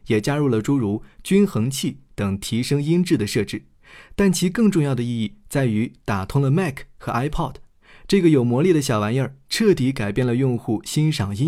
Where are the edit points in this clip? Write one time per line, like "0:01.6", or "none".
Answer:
none